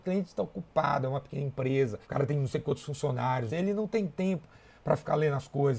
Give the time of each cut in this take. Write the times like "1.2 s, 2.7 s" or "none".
2.0 s, 3.5 s